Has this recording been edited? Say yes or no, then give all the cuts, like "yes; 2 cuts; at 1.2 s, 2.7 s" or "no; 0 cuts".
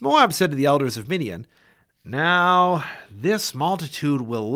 no; 0 cuts